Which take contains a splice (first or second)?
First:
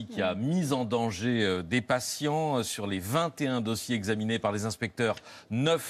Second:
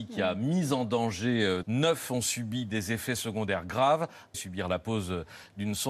second